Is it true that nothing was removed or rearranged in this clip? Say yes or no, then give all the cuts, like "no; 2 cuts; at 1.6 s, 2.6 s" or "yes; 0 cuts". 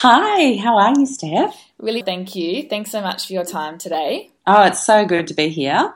no; 2 cuts; at 2.0 s, 4.4 s